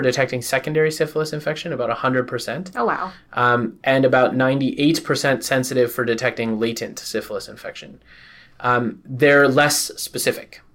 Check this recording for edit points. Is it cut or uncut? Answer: uncut